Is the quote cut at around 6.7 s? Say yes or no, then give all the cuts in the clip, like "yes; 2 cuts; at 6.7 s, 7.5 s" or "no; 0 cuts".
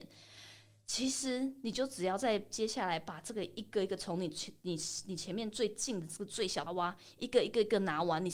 yes; 1 cut; at 6.7 s